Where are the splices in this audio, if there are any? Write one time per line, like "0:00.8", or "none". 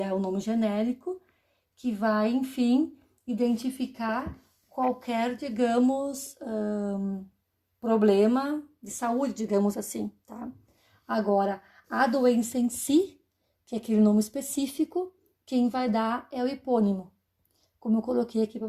none

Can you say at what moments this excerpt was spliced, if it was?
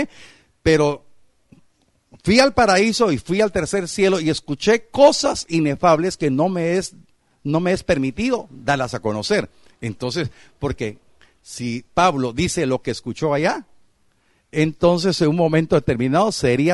none

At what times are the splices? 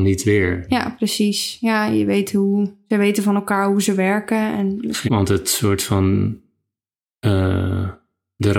0:05.1

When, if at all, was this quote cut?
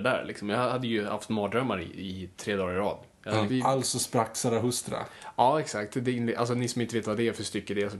0:02.3
0:03.5

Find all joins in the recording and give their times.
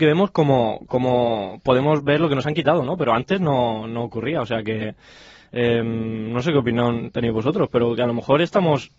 none

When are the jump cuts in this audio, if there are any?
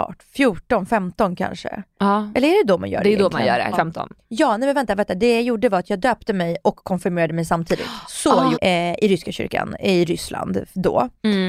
0:03.7
0:08.5

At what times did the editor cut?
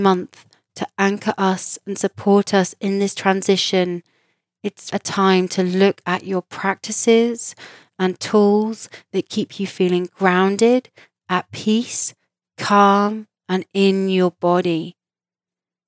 0:04.9

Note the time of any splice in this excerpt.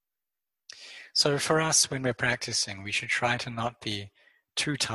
0:01.1

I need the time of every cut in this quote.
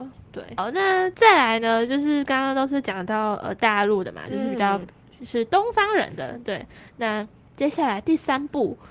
none

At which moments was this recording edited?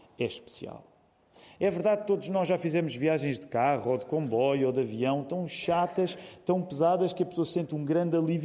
none

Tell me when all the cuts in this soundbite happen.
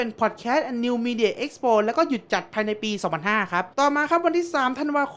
0:03.7

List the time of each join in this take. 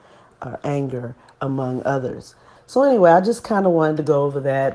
0:02.6

